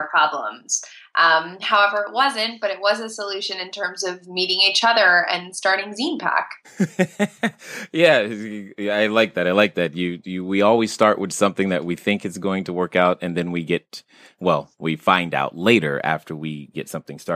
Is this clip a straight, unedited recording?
yes; 0 cuts

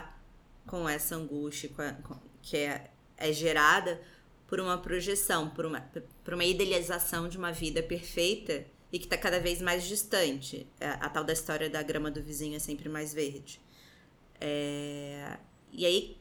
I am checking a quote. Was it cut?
no; 0 cuts

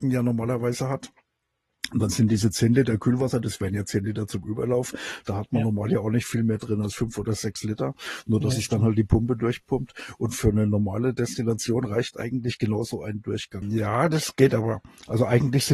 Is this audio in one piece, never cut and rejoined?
no; 2 cuts; at 3.4 s, 13.6 s

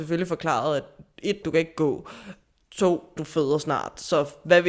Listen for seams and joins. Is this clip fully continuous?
no; 2 cuts; at 1.4 s, 3.2 s

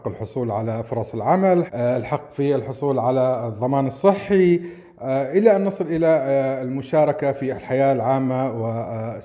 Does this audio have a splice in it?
yes; 1 cut; at 1.7 s

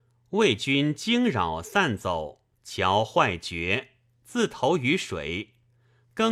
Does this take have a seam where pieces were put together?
yes; 1 cut; at 2.5 s

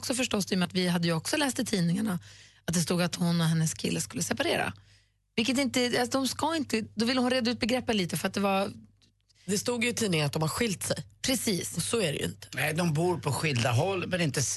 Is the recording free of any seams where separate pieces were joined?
no; 1 cut; at 6.9 s

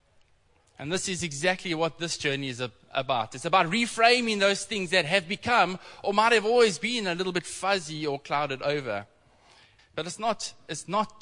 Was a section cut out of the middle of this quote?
yes; 1 cut; at 9.8 s

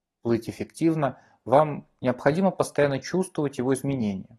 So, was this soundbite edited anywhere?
no; 0 cuts

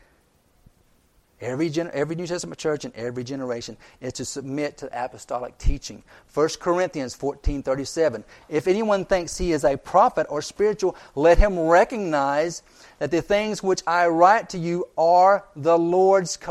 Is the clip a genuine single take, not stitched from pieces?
yes; 0 cuts

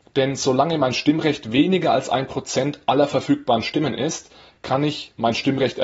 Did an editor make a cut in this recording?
no; 0 cuts

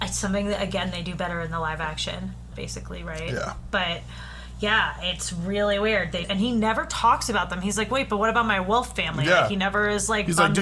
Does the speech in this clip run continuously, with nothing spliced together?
no; 2 cuts; at 2.5 s, 6.2 s

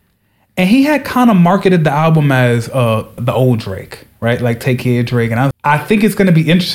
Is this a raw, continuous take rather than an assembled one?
no; 2 cuts; at 3.2 s, 5.5 s

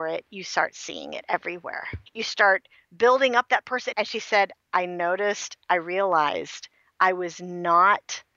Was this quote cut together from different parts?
yes; 2 cuts; at 2.1 s, 3.9 s

